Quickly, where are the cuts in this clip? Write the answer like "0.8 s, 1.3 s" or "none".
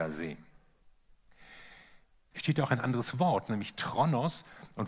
2.3 s